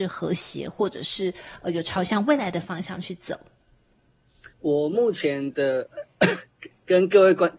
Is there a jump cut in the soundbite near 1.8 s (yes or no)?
no